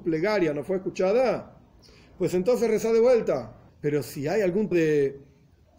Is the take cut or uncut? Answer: cut